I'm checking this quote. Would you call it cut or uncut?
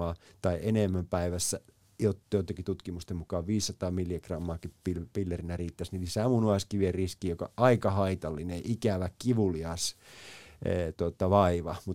uncut